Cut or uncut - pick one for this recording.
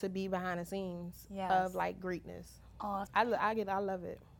cut